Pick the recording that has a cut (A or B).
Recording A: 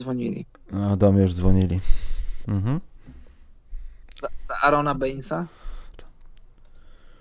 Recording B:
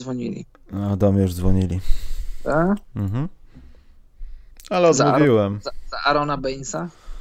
A